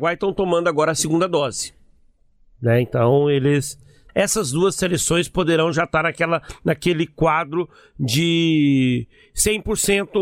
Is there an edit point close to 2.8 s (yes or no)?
no